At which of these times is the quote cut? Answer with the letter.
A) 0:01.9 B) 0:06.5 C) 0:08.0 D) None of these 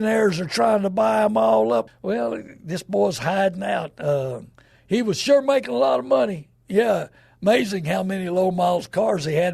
A